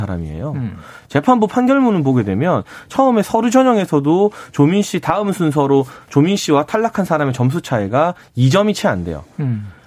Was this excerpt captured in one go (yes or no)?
yes